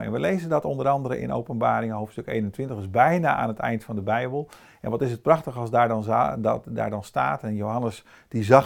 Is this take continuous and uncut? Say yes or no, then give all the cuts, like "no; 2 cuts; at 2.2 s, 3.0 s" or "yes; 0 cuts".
yes; 0 cuts